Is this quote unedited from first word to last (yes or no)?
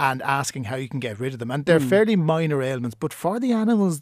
no